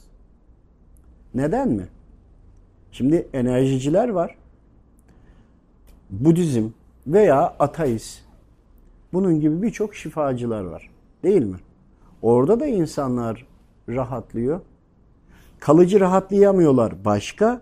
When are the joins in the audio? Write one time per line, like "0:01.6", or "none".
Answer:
0:09.1